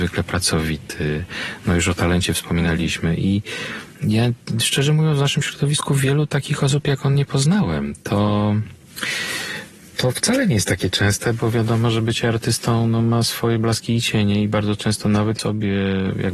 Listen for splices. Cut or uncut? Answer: cut